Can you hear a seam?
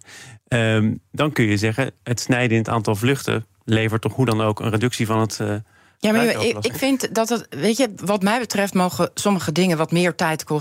no; 0 cuts

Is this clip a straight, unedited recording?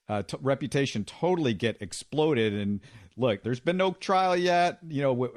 no; 1 cut; at 3.4 s

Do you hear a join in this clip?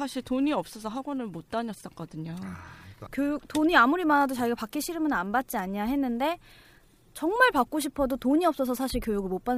yes; 1 cut; at 3.1 s

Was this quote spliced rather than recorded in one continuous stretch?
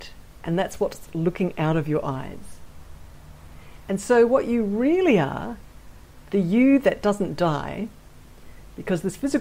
no; 0 cuts

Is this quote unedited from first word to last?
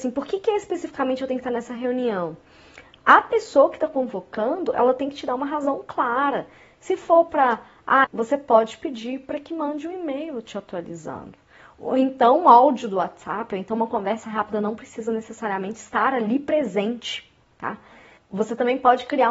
no; 1 cut; at 8.0 s

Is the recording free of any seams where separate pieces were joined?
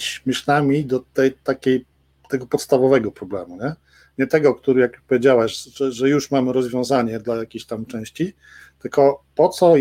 yes; 0 cuts

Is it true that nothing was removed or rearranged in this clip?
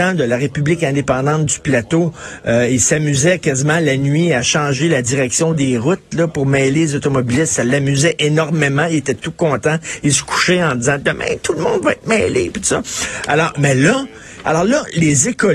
no; 1 cut; at 14.4 s

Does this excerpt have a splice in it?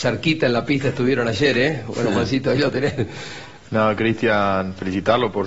yes; 1 cut; at 3.6 s

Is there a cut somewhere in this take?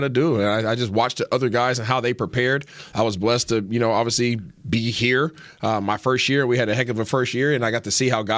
no; 0 cuts

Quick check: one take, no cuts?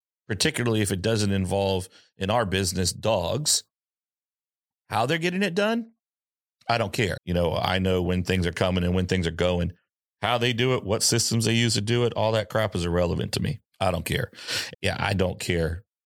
no; 3 cuts; at 7.2 s, 13.7 s, 14.7 s

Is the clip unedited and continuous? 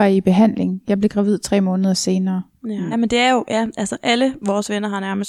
no; 1 cut; at 2.9 s

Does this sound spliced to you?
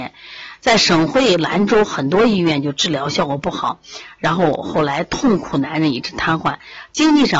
no; 0 cuts

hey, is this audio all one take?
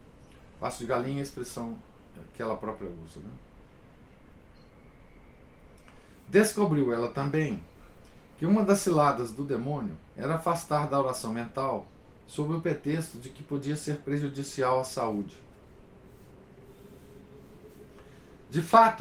no; 1 cut; at 10.1 s

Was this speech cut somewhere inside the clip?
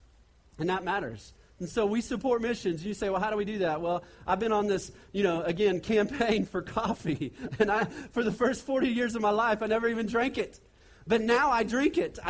no; 0 cuts

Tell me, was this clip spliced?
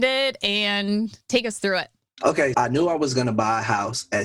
yes; 1 cut; at 2.5 s

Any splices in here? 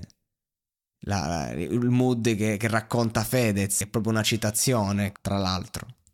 yes; 2 cuts; at 3.8 s, 5.2 s

